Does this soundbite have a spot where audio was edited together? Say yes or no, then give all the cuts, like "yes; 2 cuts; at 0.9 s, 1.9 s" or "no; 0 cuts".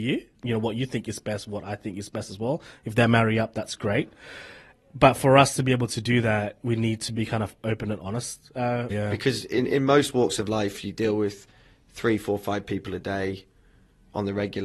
yes; 1 cut; at 8.9 s